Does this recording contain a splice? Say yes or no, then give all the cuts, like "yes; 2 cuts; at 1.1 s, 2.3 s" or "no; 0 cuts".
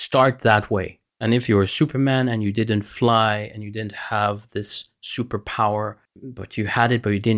yes; 1 cut; at 1.1 s